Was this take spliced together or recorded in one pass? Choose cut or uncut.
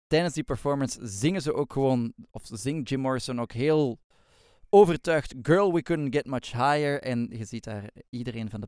uncut